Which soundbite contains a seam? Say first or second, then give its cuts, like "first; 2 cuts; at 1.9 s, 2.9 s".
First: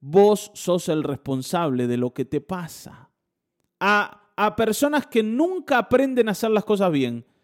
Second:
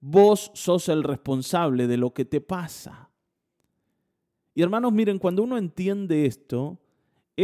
first; 1 cut; at 3.7 s